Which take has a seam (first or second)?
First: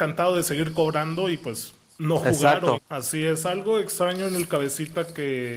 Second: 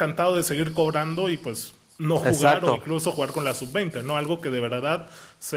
first